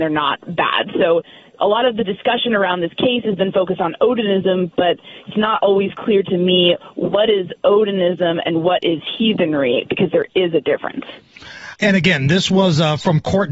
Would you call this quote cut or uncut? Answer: cut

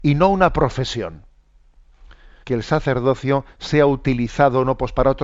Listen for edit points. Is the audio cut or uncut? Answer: cut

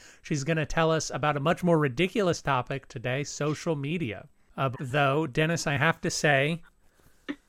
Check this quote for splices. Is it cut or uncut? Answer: cut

